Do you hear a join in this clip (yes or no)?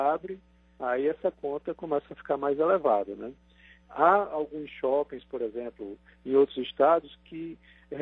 yes